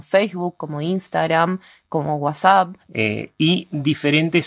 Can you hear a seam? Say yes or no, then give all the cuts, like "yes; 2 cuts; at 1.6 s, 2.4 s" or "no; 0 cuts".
yes; 1 cut; at 2.8 s